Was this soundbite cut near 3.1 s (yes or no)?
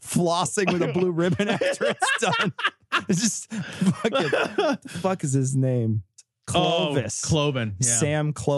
no